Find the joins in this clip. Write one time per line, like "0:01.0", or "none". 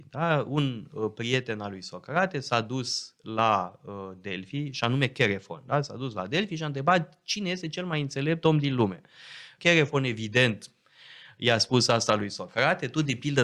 0:09.6

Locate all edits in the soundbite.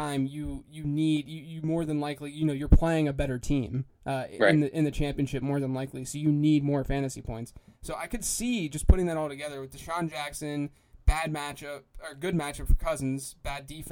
0:07.7

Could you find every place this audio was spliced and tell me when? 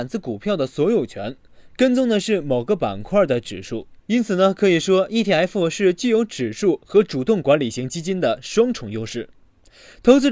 0:04.0

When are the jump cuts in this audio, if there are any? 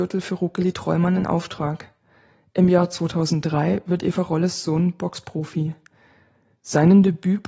none

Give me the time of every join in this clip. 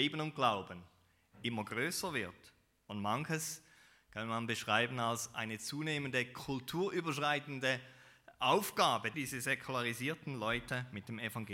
0:09.1

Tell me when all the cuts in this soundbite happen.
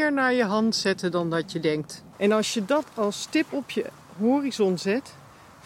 0:02.1

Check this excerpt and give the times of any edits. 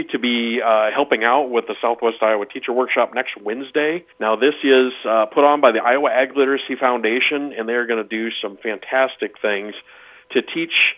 0:04.1

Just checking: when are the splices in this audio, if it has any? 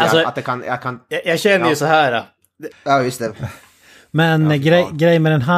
0:02.7

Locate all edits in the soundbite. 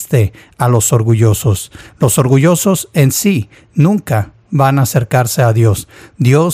none

